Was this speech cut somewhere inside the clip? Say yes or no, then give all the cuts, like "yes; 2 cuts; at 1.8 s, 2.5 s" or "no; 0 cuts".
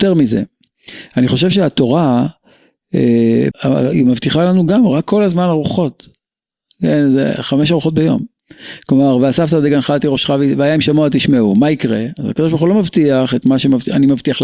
yes; 1 cut; at 3.5 s